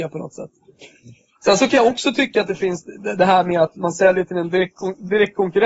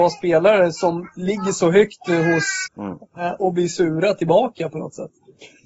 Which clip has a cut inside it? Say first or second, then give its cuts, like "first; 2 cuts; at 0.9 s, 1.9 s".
second; 1 cut; at 2.7 s